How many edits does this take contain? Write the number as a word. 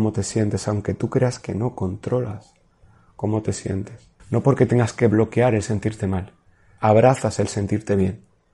two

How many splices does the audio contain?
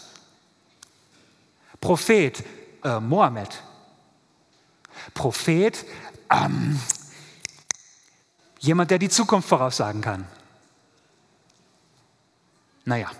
one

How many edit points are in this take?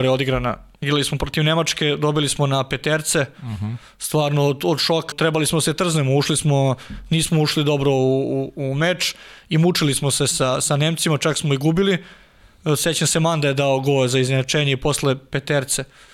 one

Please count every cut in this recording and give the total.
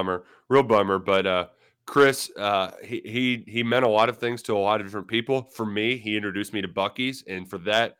zero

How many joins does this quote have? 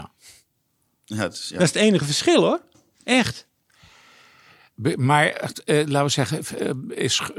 zero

